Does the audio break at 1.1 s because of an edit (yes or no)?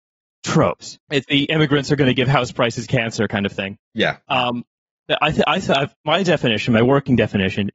yes